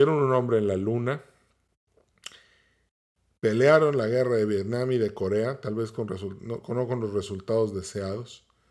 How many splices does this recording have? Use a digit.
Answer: 0